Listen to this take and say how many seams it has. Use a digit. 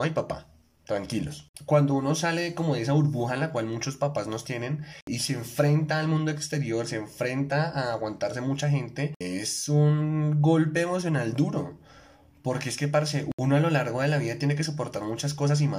0